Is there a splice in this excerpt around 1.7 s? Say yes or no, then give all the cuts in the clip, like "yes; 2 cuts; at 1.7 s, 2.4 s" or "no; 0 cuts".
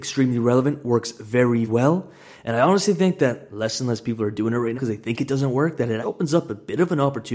yes; 3 cuts; at 1.7 s, 4.7 s, 6.0 s